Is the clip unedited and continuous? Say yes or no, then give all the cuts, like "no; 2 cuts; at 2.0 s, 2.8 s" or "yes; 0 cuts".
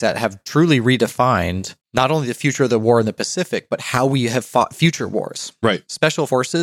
no; 1 cut; at 1.8 s